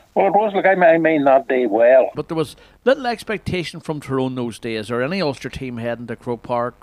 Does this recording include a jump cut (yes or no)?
yes